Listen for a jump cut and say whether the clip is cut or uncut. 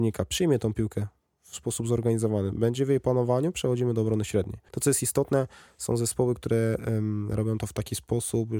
cut